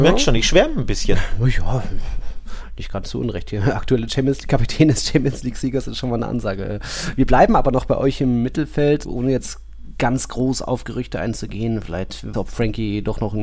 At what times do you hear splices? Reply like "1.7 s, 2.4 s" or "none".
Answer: 9.0 s, 12.3 s

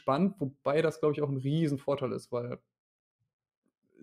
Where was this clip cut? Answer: none

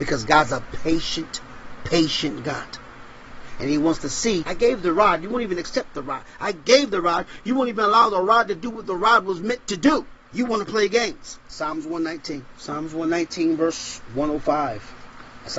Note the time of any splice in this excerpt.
4.4 s

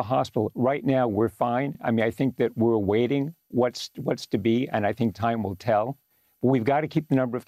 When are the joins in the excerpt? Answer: none

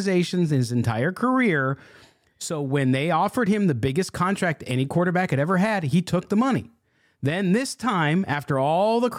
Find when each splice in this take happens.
none

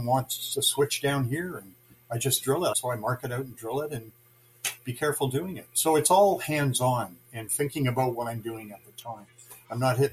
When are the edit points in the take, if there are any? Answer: 2.7 s

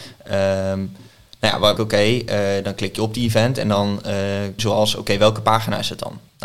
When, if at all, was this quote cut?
1.8 s, 4.6 s

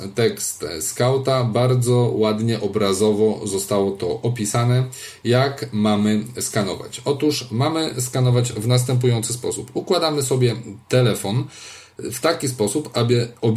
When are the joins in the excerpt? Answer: none

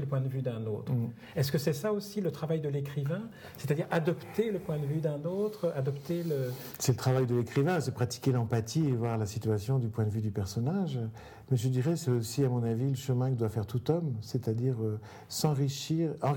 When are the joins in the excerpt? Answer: none

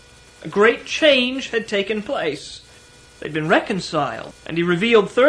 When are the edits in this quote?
4.3 s

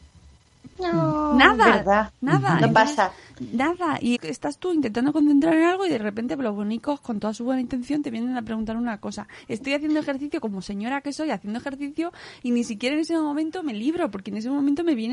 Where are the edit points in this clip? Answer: 4.1 s

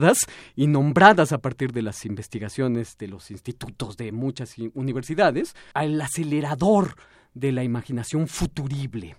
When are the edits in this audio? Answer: 5.7 s

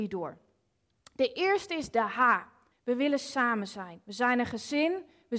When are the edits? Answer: 2.7 s

